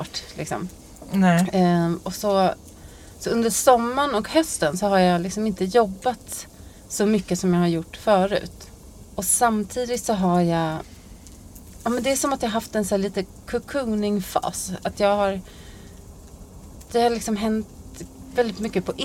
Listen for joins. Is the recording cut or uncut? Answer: cut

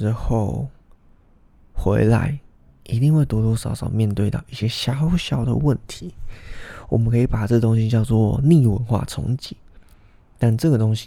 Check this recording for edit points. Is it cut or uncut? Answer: uncut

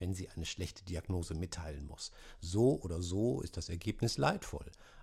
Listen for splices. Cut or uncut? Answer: uncut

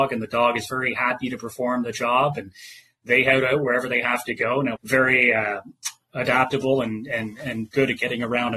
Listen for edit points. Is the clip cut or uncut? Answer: cut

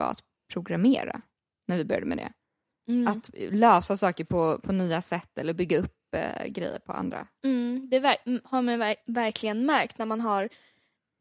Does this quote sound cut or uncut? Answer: uncut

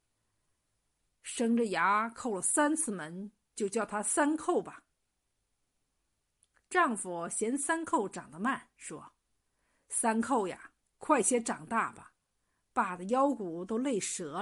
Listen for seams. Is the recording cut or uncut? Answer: uncut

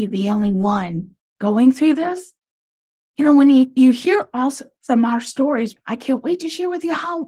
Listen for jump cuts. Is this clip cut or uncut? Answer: uncut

